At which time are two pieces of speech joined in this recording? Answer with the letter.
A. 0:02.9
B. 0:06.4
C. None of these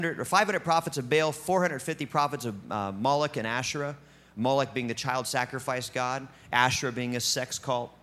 C